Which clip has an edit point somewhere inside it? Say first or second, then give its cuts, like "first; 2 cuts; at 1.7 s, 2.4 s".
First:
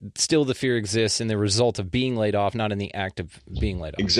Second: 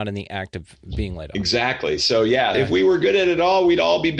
second; 1 cut; at 2.5 s